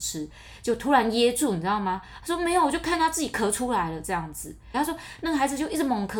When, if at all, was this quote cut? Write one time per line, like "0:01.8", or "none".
0:02.2
0:04.7